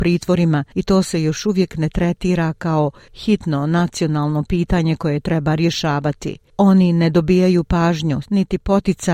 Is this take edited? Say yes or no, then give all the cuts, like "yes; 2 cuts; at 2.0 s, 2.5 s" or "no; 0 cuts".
yes; 1 cut; at 8.2 s